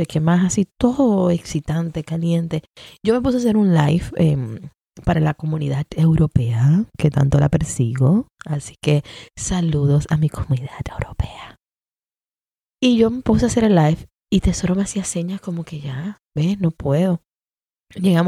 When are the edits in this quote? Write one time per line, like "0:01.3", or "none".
none